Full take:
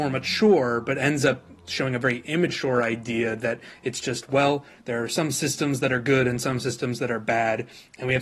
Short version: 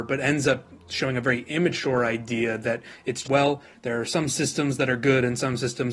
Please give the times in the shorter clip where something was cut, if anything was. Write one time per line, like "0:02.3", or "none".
0:03.2